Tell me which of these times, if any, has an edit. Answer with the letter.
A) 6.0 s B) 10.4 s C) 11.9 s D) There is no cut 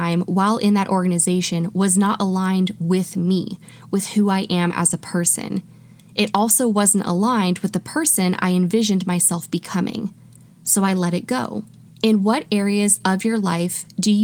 C